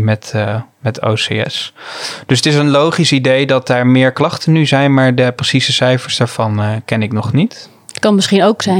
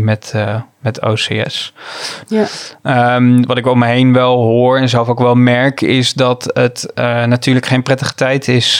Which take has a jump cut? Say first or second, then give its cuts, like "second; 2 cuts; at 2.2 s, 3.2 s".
second; 1 cut; at 2.3 s